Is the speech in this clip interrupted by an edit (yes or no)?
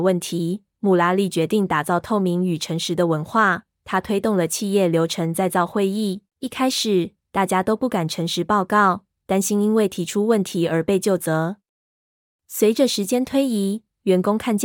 yes